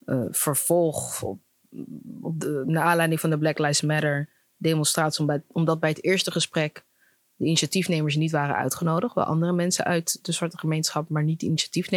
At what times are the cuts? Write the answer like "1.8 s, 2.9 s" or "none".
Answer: none